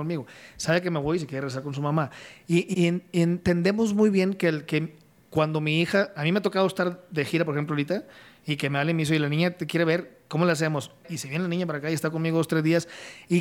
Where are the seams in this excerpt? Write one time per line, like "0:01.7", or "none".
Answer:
0:02.7
0:11.0